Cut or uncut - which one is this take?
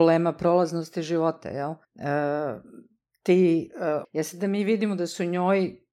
cut